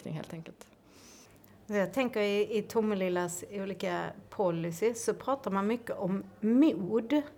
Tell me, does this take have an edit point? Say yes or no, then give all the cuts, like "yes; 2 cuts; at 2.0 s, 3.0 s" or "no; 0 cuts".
no; 0 cuts